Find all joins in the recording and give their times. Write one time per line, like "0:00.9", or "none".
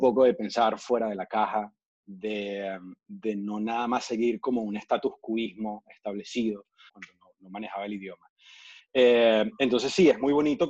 0:06.9
0:08.8